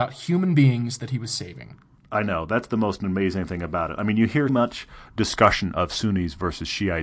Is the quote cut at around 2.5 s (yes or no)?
no